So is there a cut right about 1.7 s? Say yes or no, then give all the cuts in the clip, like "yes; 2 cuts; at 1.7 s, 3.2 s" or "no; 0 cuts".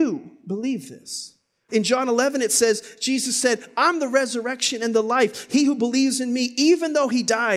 yes; 1 cut; at 1.7 s